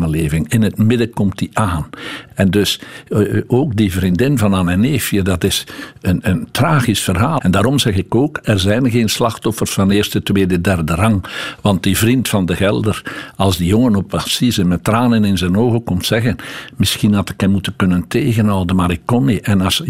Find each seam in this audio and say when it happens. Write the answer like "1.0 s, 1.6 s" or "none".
2.3 s, 7.4 s